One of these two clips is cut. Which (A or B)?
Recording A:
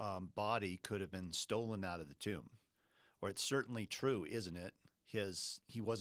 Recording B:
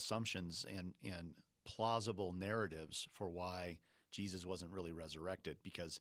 A